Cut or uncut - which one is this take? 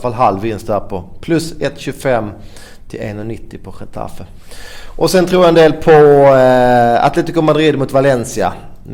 uncut